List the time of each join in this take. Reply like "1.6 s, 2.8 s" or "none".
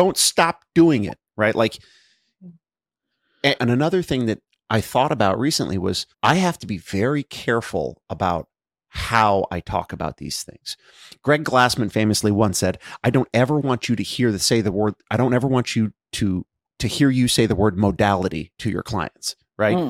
3.6 s, 6.1 s